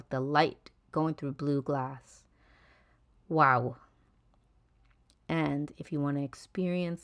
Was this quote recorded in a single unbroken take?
yes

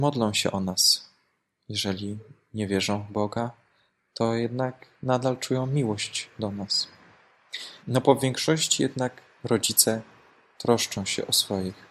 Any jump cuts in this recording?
yes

